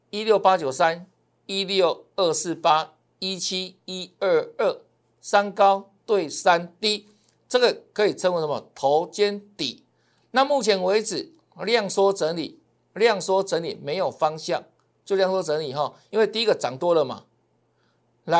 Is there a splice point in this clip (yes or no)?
no